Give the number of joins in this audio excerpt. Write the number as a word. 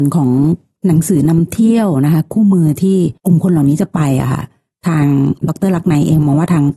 one